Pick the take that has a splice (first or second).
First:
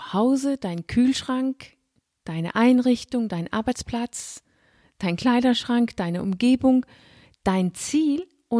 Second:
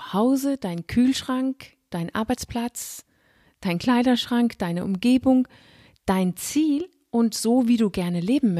second